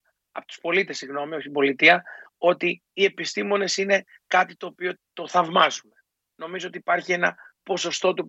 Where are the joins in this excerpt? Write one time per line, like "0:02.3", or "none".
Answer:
0:05.0

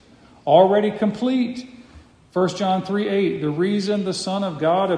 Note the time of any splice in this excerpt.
0:02.3

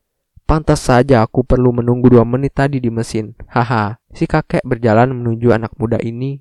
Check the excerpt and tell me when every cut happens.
0:04.0

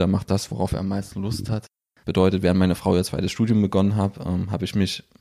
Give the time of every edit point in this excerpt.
0:02.0

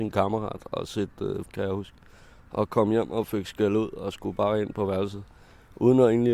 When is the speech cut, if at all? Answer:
0:01.4

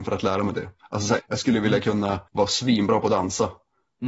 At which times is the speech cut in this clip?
0:01.2
0:02.3

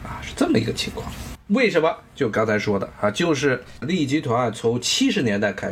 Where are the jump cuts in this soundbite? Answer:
0:01.4

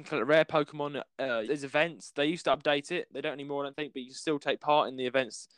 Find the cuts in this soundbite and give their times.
0:01.5

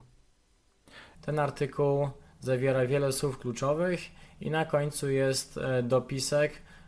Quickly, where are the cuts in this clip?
0:01.2

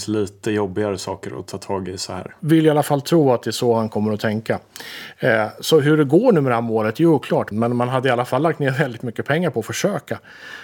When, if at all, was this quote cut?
0:02.4
0:07.5

